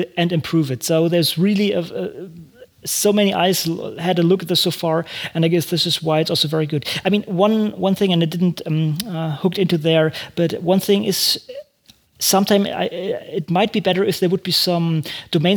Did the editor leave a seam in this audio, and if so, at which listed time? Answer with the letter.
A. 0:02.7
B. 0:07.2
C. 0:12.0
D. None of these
D